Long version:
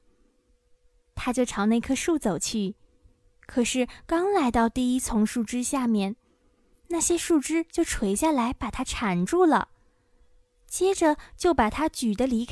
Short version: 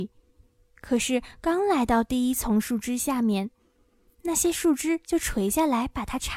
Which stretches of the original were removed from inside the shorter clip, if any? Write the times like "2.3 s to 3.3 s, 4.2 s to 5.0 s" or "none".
none